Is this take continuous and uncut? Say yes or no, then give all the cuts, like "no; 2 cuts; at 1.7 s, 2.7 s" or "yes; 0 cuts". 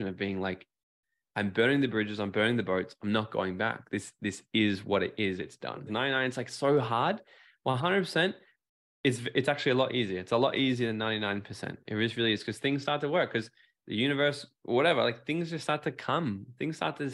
no; 1 cut; at 5.9 s